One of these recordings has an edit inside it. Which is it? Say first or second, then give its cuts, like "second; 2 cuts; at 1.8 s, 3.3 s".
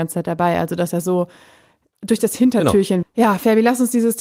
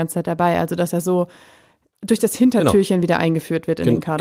first; 1 cut; at 3.0 s